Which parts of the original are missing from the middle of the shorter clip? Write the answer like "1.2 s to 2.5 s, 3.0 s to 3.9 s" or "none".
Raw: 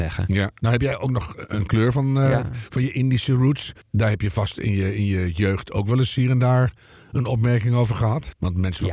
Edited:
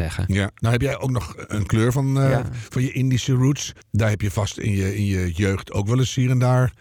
none